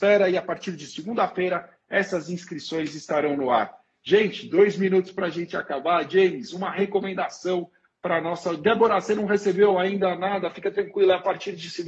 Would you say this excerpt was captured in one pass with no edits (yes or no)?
yes